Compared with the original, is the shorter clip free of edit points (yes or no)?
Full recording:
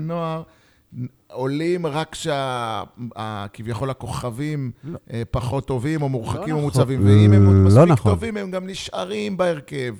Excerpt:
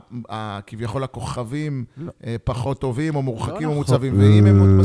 yes